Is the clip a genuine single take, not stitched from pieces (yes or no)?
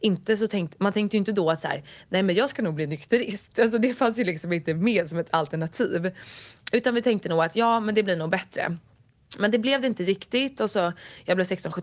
yes